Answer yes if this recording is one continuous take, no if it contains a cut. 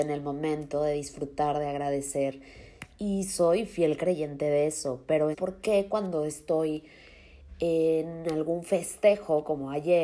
no